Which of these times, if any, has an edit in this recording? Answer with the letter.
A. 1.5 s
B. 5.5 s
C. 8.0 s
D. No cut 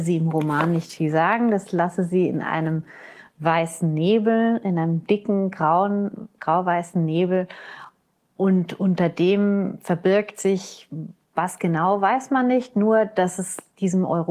D